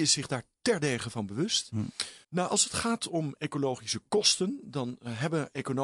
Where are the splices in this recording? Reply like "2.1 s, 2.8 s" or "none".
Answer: 2.2 s